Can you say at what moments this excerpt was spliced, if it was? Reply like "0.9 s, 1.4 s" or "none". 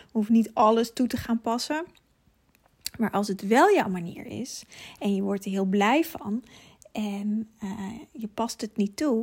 none